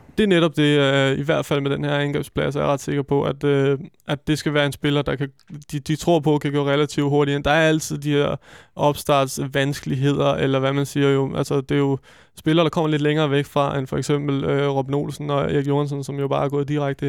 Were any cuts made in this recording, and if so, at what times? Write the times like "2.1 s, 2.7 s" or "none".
none